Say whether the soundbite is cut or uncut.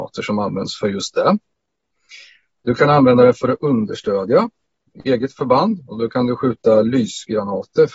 uncut